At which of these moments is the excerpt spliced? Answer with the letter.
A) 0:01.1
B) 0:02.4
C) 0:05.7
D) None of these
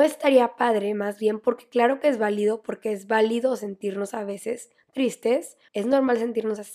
C